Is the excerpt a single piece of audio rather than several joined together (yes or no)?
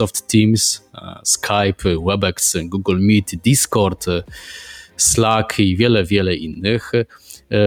yes